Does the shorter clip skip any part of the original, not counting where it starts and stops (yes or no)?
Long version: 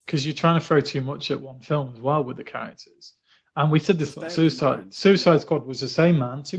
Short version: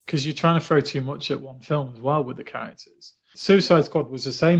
yes